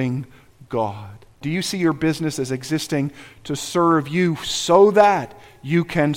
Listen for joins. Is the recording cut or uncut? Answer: cut